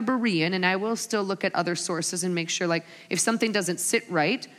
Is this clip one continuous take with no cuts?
yes; 0 cuts

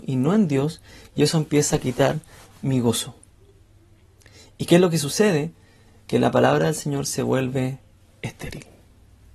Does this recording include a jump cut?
no; 0 cuts

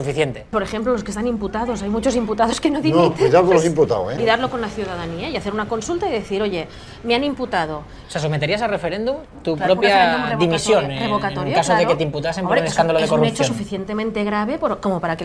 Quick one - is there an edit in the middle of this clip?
yes; 1 cut; at 4.2 s

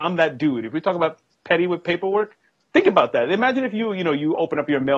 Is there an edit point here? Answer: no; 0 cuts

